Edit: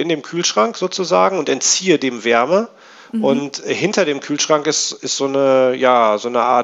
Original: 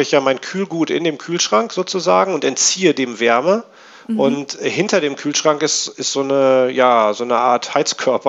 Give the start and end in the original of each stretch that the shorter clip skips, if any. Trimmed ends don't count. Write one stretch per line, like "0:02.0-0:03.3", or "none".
none